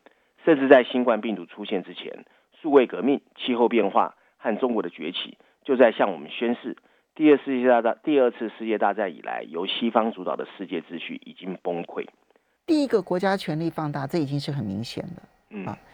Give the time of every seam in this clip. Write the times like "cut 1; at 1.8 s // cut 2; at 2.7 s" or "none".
cut 1; at 12.6 s